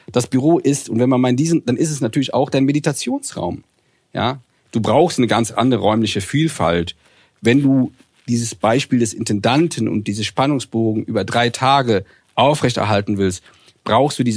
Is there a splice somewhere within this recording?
no; 0 cuts

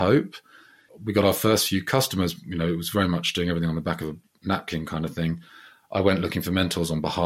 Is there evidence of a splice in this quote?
no; 0 cuts

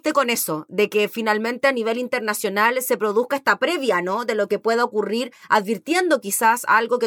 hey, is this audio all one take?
yes; 0 cuts

